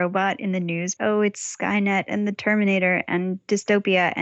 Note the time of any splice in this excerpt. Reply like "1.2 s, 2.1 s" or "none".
1.0 s